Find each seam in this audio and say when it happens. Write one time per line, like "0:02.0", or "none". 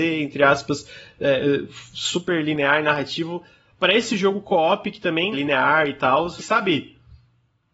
0:05.3
0:06.4